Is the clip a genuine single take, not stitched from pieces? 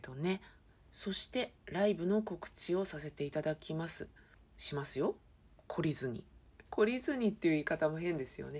yes; 0 cuts

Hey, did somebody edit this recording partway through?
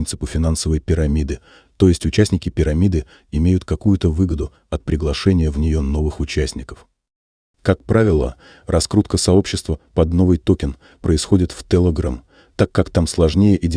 no; 0 cuts

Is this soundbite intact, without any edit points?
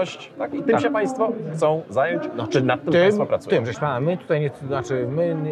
no; 1 cut; at 3.7 s

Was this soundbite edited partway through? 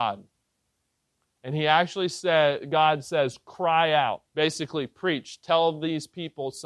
yes; 1 cut; at 4.3 s

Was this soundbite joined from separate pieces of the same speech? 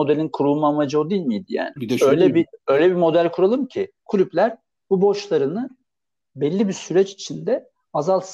yes; 2 cuts; at 1.8 s, 4.0 s

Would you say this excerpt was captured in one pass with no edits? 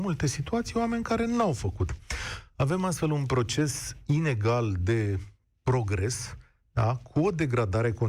yes; 0 cuts

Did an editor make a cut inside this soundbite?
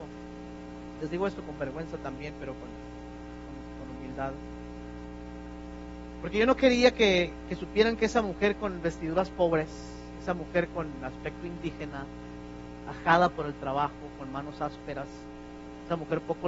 no; 0 cuts

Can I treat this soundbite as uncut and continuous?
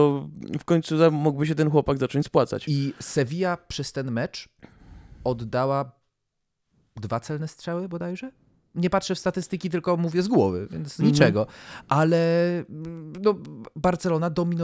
yes; 0 cuts

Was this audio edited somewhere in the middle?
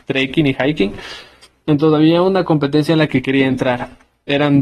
no; 0 cuts

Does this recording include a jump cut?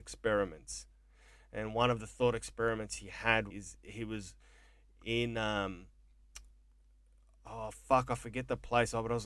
yes; 1 cut; at 3.5 s

